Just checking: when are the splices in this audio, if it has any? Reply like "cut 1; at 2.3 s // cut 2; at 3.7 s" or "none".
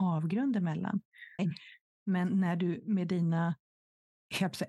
cut 1; at 1.4 s